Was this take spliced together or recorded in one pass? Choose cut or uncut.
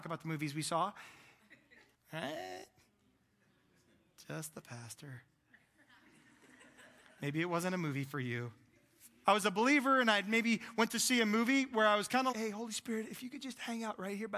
cut